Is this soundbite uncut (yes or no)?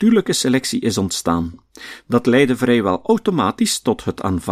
yes